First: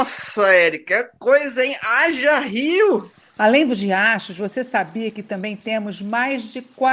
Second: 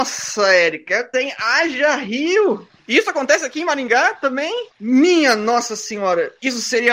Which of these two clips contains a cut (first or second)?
second